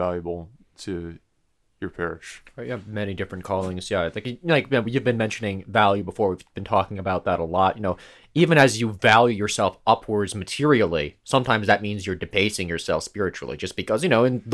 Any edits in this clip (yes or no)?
no